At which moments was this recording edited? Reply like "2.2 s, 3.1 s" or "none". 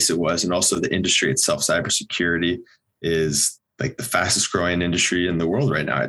none